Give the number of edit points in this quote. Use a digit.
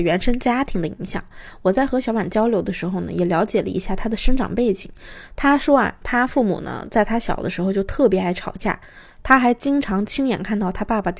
0